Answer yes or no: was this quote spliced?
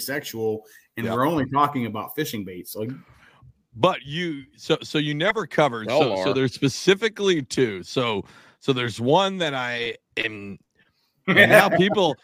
yes